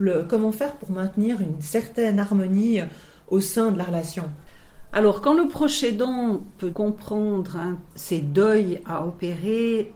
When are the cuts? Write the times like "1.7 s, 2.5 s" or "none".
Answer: 6.7 s, 7.9 s